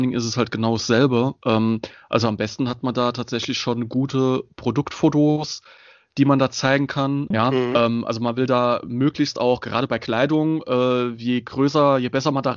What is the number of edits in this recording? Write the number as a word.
one